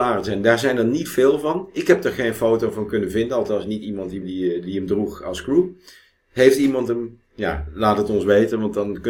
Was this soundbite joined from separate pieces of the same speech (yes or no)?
yes